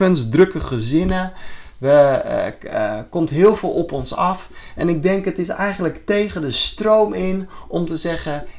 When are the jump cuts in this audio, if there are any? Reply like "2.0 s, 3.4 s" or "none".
none